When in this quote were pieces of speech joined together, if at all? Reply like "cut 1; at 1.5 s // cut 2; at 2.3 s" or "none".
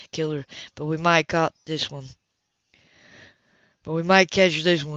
none